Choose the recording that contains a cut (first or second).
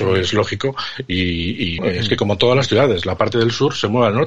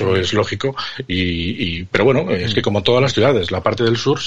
first